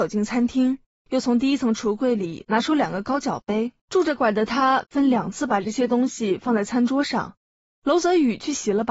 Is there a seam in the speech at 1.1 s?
yes; 3 cuts; at 1.1 s, 3.8 s, 7.8 s

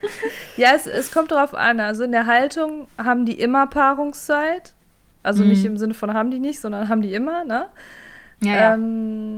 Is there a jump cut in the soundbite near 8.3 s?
no; 0 cuts

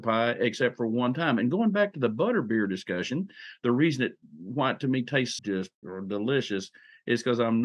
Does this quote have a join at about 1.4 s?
no; 1 cut; at 5.4 s

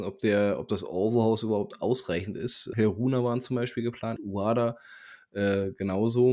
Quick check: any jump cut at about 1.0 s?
no; 2 cuts; at 2.7 s, 4.2 s

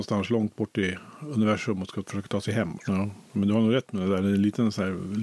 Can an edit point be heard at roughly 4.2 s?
no; 1 cut; at 2.8 s

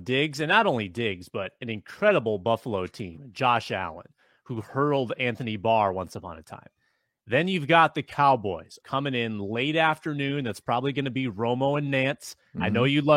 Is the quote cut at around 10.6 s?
no; 1 cut; at 8.8 s

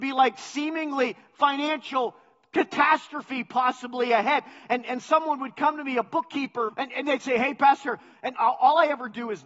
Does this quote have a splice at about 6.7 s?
yes; 2 cuts; at 6.7 s, 8.3 s

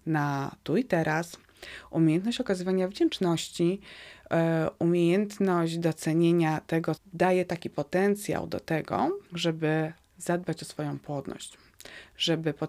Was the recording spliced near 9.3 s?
yes; 2 cuts; at 7.0 s, 9.3 s

